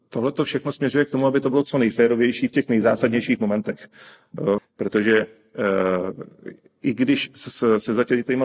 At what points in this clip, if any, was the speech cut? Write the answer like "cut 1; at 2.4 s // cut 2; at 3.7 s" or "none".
cut 1; at 4.6 s

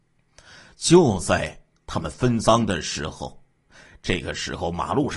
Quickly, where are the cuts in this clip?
none

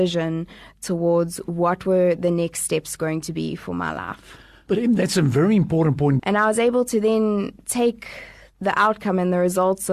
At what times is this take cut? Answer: cut 1; at 6.2 s

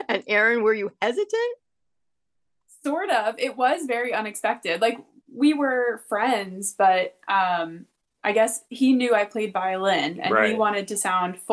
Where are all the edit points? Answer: cut 1; at 2.7 s

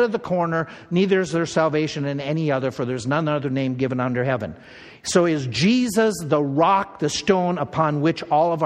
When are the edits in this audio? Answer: none

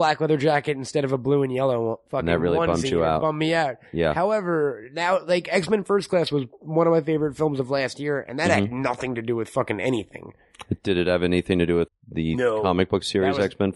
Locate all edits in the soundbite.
cut 1; at 11.9 s

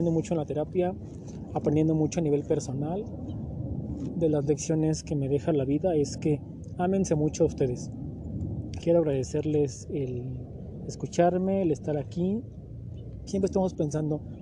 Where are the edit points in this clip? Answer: cut 1; at 8.8 s // cut 2; at 13.3 s

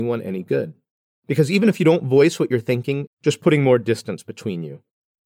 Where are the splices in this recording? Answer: cut 1; at 1.2 s // cut 2; at 3.1 s

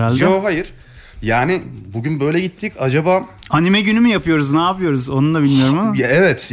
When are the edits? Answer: none

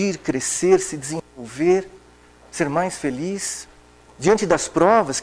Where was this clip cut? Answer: cut 1; at 4.1 s

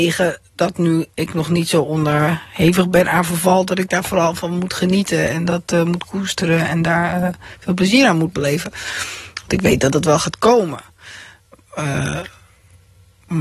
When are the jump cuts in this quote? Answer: none

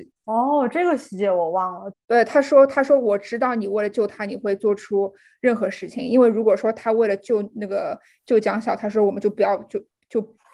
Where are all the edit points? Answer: cut 1; at 1.9 s

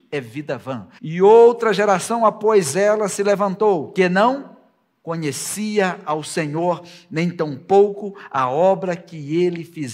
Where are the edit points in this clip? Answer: cut 1; at 1.0 s

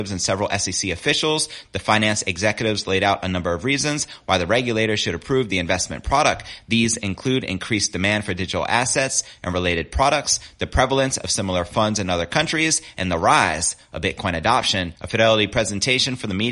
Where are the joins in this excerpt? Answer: none

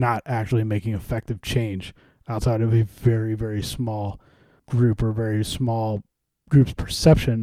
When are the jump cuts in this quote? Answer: cut 1; at 4.6 s

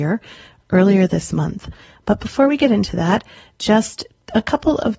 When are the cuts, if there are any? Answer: none

